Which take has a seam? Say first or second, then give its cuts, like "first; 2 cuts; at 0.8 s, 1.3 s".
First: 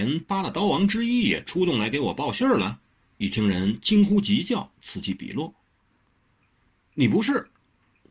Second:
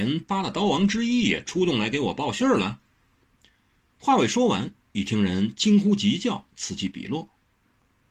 first; 1 cut; at 3.1 s